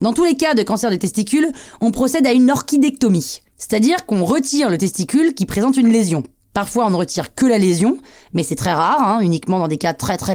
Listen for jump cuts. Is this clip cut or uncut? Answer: uncut